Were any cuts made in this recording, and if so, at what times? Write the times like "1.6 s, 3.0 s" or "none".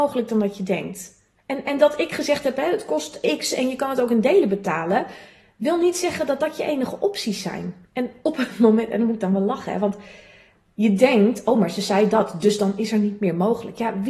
none